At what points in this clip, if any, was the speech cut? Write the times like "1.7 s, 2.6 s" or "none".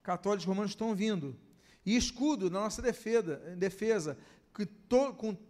none